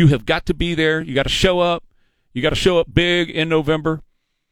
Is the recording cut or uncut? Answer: uncut